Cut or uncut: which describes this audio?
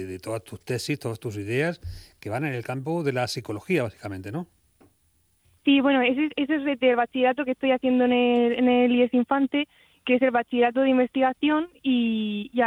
uncut